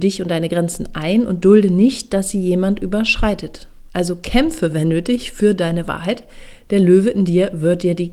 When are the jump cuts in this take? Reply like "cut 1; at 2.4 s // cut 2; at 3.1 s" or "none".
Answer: none